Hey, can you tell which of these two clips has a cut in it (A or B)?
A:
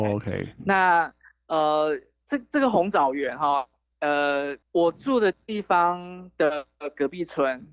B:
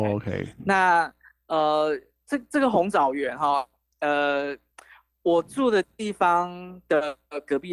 A